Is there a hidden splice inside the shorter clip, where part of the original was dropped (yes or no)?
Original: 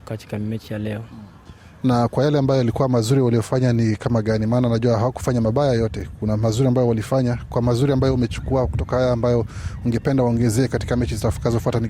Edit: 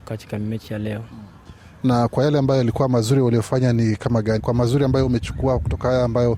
yes